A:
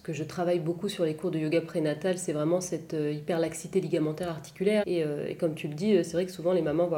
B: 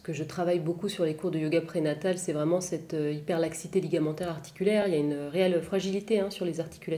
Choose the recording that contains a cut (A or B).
A